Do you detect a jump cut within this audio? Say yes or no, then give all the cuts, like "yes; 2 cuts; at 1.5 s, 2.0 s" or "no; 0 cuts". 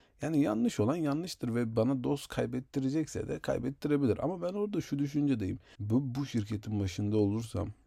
yes; 1 cut; at 5.7 s